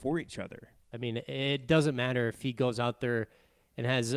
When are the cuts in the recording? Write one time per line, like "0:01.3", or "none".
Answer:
0:00.9